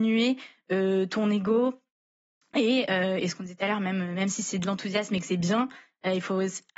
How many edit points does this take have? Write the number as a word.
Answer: zero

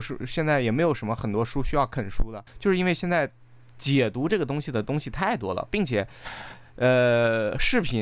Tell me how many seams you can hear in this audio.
one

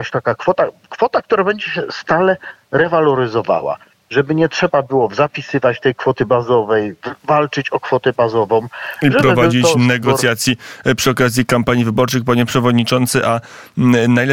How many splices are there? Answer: zero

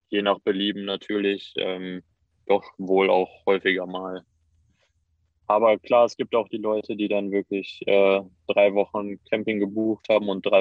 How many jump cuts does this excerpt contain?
zero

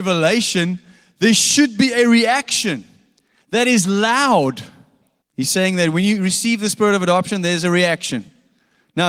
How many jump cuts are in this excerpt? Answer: one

